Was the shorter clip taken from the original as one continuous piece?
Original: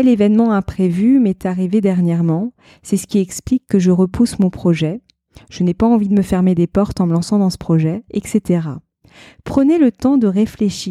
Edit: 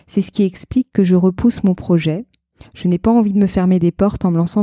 yes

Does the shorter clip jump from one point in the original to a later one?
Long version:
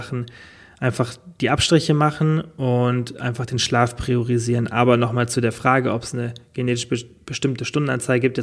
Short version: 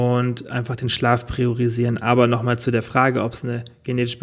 no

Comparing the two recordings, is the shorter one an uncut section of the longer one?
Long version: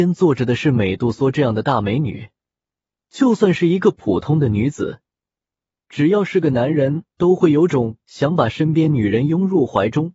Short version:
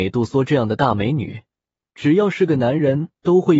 no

